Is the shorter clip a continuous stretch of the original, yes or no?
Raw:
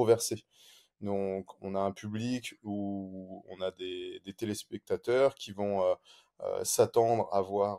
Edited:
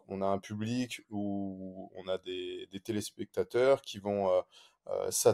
yes